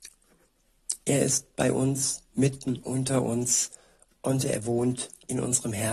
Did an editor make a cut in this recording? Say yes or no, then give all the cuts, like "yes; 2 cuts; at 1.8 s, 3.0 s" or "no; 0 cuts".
no; 0 cuts